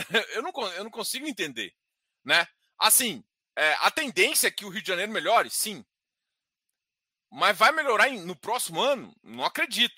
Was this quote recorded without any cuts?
yes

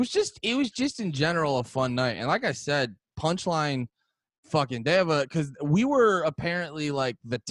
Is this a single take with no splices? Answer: yes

